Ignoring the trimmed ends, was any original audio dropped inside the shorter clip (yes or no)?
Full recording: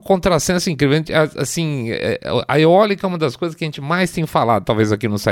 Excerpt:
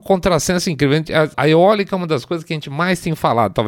yes